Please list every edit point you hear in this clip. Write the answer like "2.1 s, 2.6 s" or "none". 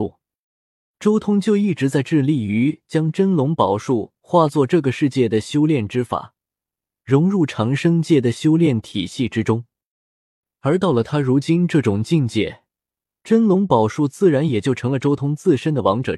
0.9 s